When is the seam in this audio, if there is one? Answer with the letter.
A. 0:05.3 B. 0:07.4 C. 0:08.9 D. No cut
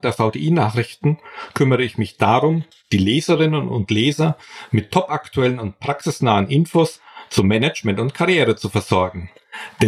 D